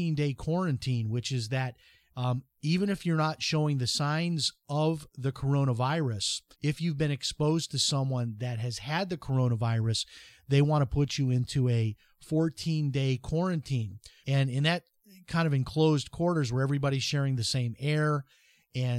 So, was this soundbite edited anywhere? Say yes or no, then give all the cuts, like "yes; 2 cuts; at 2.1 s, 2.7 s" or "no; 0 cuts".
yes; 2 cuts; at 6.5 s, 14.2 s